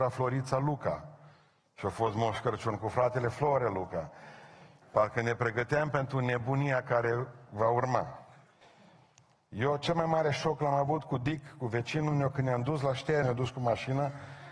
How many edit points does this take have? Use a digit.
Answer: 2